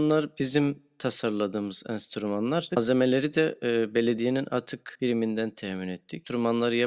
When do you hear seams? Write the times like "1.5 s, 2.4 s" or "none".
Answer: 2.7 s